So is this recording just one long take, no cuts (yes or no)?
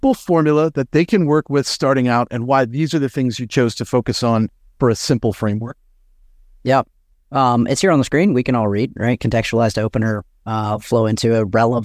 yes